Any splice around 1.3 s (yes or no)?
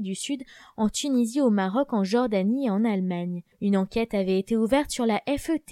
no